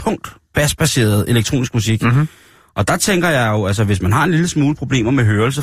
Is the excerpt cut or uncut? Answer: uncut